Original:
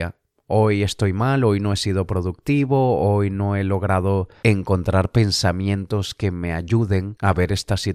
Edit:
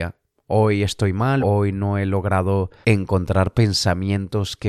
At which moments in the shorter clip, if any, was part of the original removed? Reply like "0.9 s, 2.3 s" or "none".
1.4 s